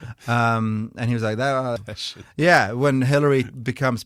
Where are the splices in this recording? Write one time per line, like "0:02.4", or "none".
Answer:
0:01.8